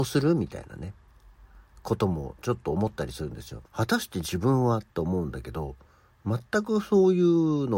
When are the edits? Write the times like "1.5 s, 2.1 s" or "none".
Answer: 3.7 s